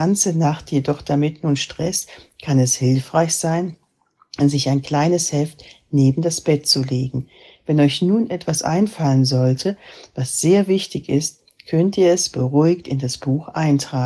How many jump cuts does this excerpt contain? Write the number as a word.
zero